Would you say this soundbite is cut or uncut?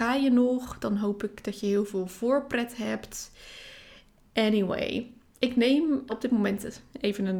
cut